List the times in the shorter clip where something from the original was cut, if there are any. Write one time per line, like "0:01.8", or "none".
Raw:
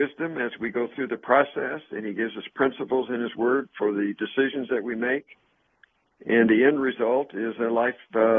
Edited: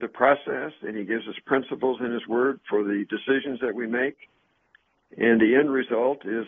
none